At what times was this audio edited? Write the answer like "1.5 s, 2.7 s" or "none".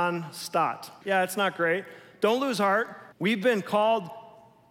1.0 s, 3.1 s

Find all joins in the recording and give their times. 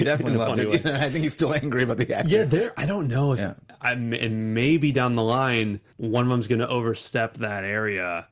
3.4 s, 5.9 s

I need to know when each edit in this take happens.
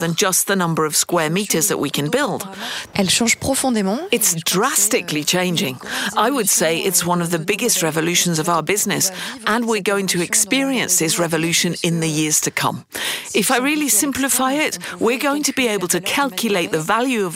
2.9 s

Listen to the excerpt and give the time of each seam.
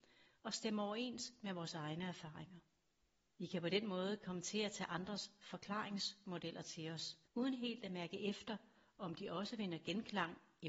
3.3 s, 7.2 s

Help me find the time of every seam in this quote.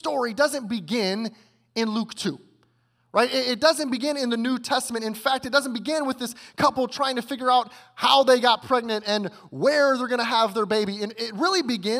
none

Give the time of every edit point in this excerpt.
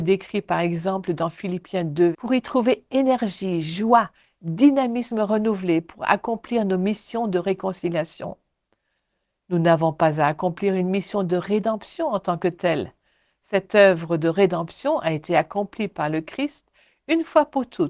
2.1 s

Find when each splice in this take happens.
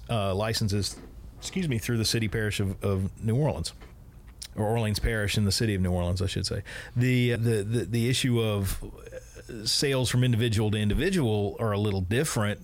4.5 s, 7.4 s

